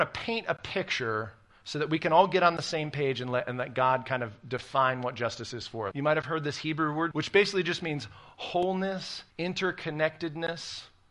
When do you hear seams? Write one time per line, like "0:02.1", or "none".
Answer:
0:05.9
0:07.1
0:09.3